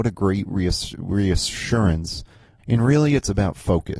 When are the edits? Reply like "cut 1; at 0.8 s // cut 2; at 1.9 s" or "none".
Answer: cut 1; at 2.6 s